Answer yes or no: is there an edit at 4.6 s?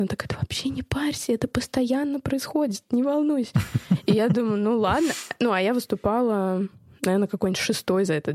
no